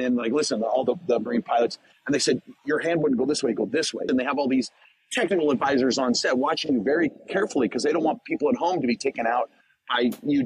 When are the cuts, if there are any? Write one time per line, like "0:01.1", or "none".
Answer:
0:04.1